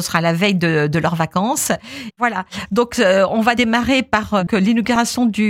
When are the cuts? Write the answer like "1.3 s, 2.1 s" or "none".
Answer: 2.1 s, 4.5 s